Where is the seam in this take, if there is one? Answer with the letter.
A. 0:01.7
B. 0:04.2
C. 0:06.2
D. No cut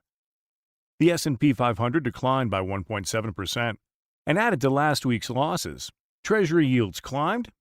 C